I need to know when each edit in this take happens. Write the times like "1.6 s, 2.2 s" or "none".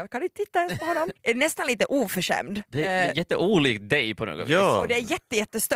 1.2 s

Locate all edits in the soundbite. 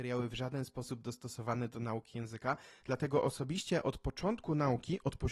2.8 s

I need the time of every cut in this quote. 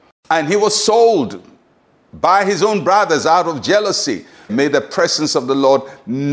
4.5 s

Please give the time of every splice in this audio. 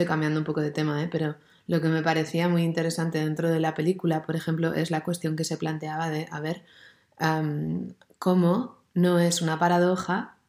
none

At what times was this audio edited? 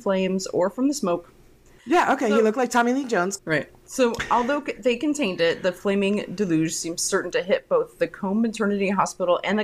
1.8 s, 3.4 s

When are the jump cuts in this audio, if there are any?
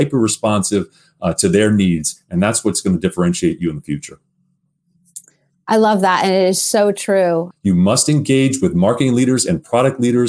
7.5 s

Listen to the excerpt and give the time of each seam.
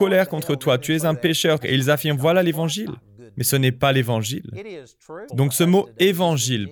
1.6 s, 5.3 s

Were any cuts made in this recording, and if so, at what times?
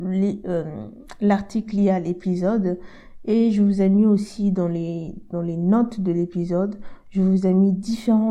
none

